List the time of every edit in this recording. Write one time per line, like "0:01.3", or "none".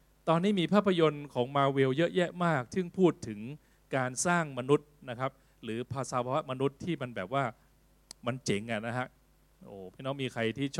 none